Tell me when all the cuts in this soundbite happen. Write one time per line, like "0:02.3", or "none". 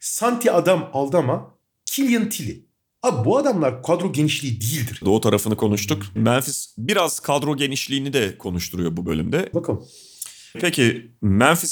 0:05.0
0:06.2
0:09.5